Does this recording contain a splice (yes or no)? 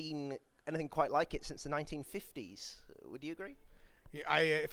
no